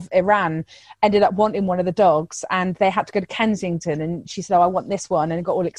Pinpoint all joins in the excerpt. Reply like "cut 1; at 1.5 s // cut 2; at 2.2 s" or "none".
none